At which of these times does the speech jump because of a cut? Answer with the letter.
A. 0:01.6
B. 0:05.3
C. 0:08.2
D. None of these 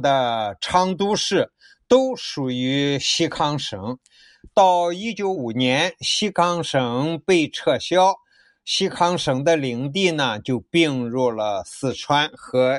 B